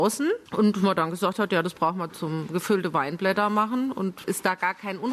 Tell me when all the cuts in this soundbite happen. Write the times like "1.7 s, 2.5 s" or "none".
2.1 s